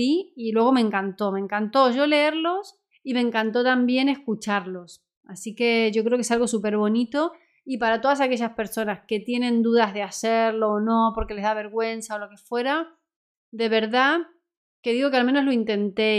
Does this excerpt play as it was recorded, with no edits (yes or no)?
yes